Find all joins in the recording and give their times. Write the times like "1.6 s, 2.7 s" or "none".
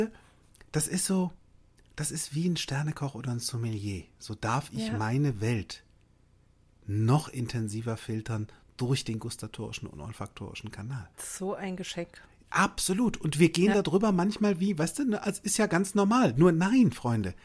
11.1 s